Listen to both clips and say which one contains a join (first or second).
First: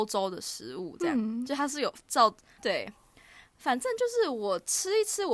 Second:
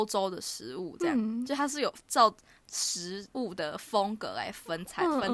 first